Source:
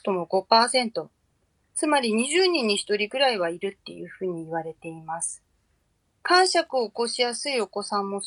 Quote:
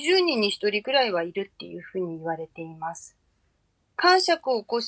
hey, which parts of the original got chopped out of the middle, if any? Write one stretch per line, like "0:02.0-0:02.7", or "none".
none